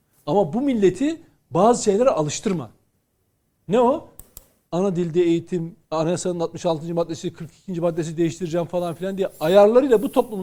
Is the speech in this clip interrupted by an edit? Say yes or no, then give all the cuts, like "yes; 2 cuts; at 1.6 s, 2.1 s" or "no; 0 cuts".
yes; 1 cut; at 5.9 s